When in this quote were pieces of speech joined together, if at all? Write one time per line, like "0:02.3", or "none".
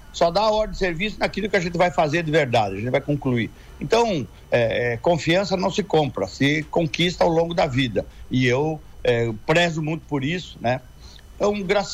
none

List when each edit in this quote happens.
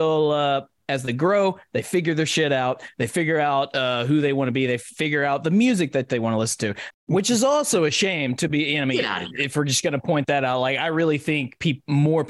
0:06.9

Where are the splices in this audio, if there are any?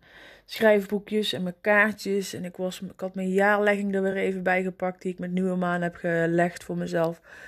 none

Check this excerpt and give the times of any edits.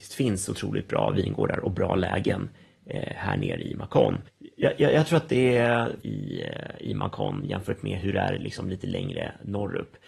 0:04.3
0:06.0

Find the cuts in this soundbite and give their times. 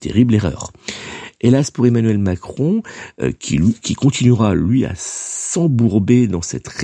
none

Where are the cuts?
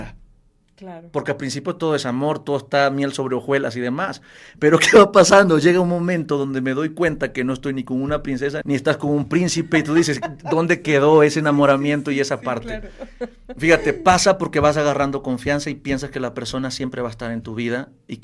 0:08.6

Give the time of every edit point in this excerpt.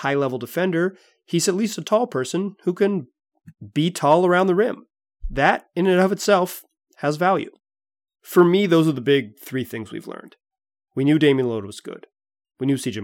none

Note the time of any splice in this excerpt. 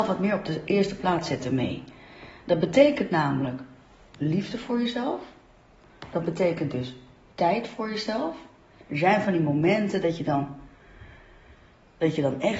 0:08.9

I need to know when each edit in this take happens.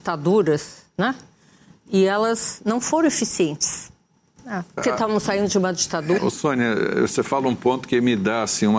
0:04.8
0:06.2

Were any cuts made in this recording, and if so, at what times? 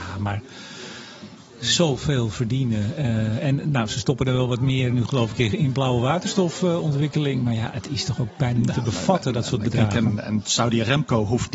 none

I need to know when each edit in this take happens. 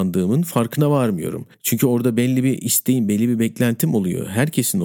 0:01.5

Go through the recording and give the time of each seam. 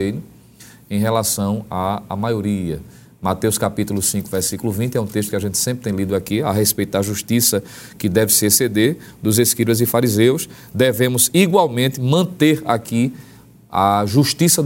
none

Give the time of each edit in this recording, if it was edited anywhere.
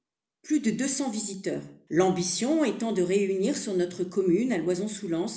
0:01.9

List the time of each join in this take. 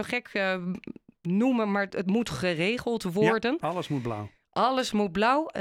0:01.9

